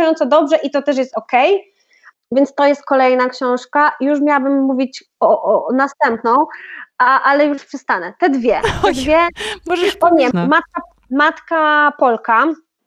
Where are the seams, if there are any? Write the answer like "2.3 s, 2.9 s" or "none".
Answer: 10.3 s